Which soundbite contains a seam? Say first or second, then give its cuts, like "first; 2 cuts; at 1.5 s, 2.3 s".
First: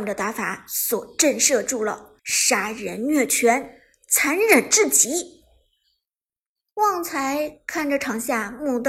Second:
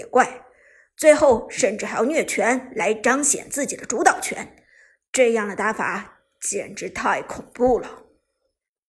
first; 1 cut; at 2.2 s